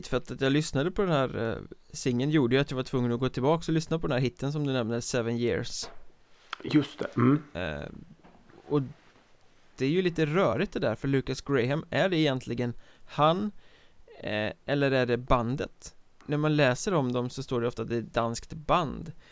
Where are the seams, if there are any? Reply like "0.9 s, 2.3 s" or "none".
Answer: 16.2 s